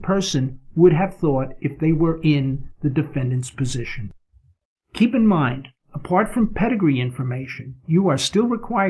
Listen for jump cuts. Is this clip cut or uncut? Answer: uncut